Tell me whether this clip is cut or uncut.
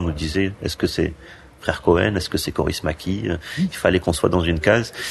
uncut